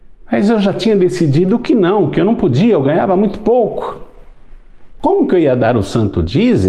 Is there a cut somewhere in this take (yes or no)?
no